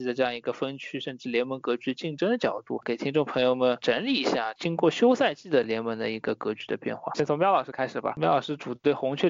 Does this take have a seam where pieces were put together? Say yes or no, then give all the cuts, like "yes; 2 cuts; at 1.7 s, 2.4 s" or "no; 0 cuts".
no; 0 cuts